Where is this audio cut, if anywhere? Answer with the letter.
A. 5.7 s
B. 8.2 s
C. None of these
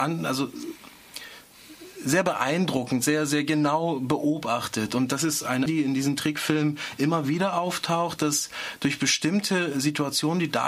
A